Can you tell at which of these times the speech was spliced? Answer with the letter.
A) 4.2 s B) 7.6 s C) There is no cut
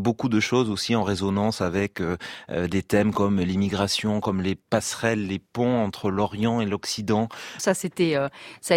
B